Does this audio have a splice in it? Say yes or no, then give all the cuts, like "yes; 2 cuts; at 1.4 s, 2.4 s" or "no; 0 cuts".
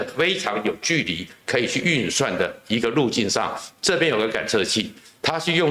no; 0 cuts